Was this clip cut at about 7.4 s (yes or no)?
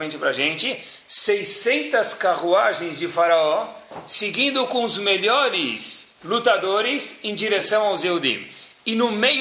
no